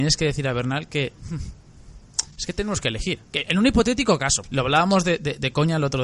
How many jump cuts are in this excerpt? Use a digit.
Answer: 2